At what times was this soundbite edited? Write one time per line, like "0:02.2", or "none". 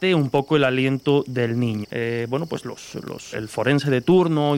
0:01.8
0:03.3